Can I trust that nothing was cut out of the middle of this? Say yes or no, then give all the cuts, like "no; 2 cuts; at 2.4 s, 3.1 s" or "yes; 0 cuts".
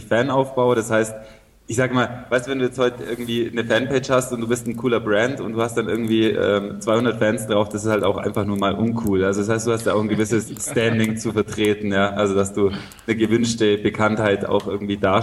yes; 0 cuts